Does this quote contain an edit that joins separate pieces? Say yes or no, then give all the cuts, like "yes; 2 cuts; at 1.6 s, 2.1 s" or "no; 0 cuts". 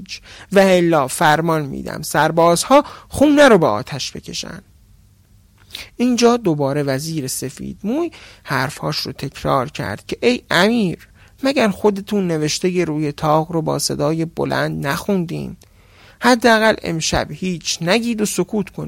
no; 0 cuts